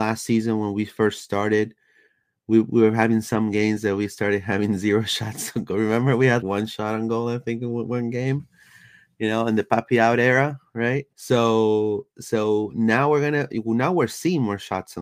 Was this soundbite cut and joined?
yes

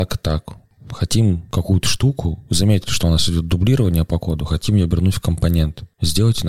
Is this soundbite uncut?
yes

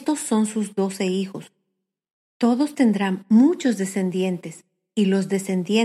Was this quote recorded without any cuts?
yes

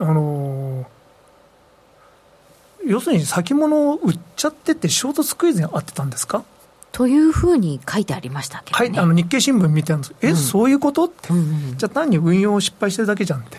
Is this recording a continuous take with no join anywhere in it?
yes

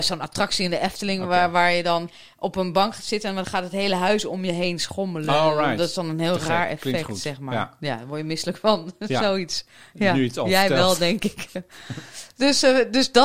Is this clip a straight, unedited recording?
yes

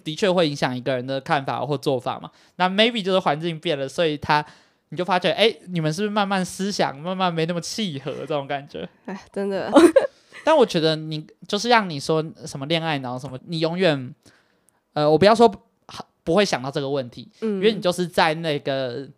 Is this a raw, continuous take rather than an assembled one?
no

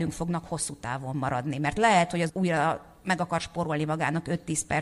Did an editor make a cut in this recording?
yes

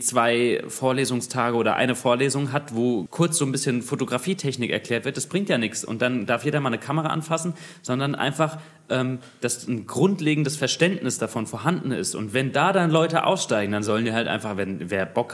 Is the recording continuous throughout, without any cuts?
no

